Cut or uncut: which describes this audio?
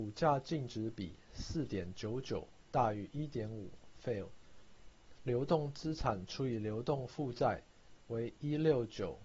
cut